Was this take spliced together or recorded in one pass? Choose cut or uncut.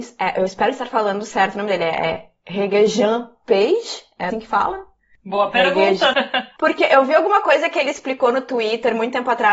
cut